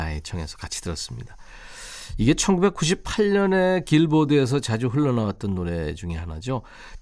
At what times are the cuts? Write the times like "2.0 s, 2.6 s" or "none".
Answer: none